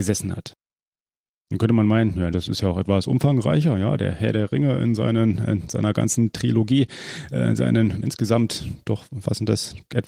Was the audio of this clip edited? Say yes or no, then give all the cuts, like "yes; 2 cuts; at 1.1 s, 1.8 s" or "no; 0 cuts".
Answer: yes; 1 cut; at 2.3 s